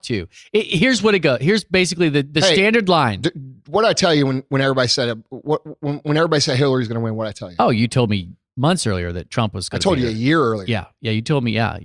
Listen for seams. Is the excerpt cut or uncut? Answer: uncut